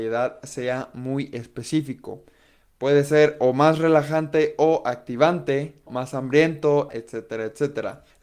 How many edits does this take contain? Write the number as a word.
two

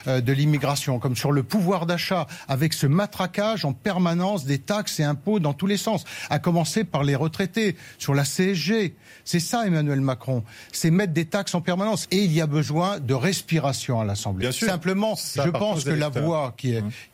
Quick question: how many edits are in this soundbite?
two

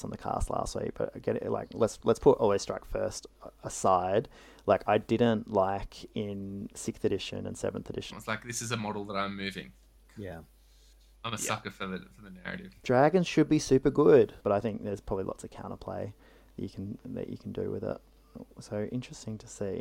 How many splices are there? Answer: two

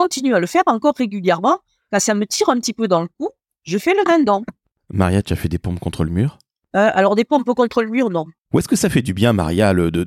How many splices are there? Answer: two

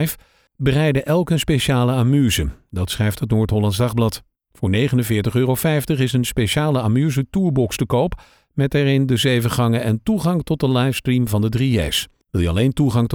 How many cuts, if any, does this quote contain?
one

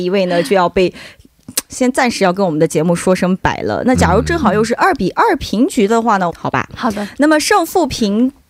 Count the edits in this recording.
two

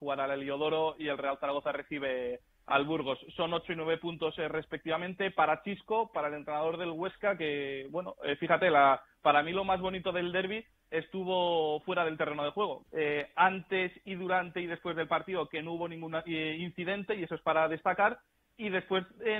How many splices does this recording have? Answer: one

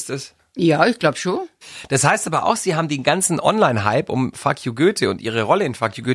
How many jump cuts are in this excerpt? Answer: zero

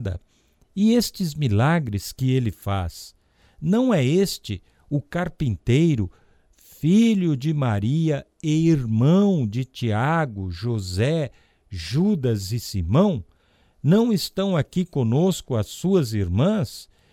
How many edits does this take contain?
zero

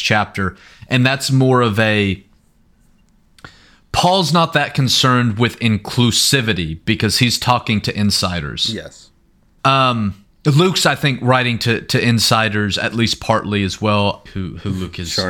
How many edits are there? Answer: two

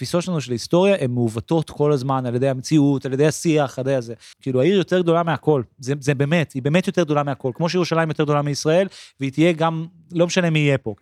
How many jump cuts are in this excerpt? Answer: one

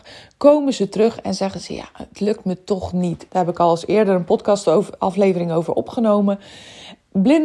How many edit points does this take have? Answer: one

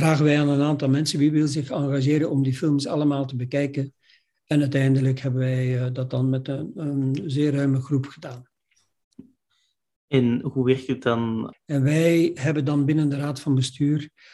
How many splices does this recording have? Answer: one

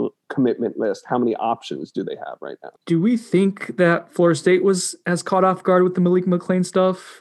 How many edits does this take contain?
one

